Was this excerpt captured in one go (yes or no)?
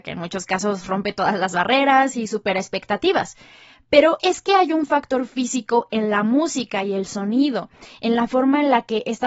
yes